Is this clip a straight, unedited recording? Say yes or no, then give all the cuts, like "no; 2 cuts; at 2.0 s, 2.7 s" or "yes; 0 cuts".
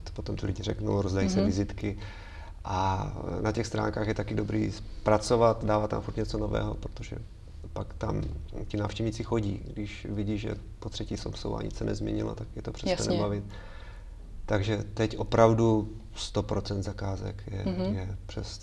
yes; 0 cuts